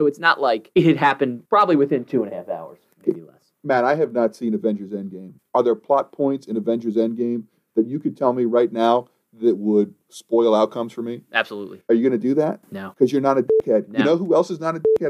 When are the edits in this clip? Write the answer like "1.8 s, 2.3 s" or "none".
5.4 s